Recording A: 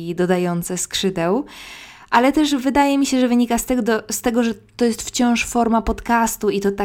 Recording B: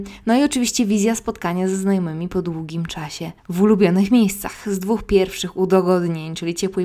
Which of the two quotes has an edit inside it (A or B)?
B